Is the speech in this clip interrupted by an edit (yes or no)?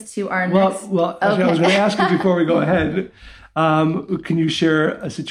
no